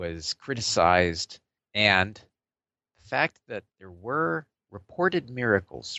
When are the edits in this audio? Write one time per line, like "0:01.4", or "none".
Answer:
0:01.6
0:03.7